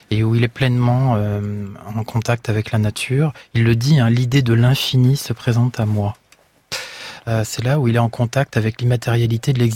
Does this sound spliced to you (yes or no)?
no